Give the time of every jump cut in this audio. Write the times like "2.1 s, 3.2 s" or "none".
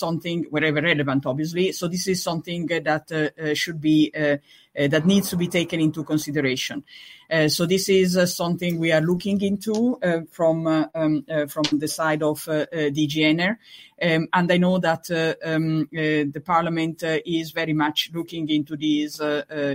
none